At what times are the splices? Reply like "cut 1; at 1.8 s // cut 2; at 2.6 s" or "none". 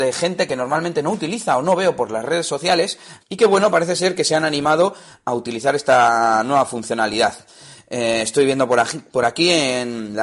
cut 1; at 3.2 s